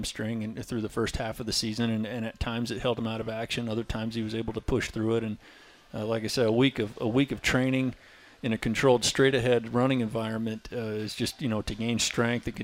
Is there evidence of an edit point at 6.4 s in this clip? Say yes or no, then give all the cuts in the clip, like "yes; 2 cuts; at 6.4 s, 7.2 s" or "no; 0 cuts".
no; 0 cuts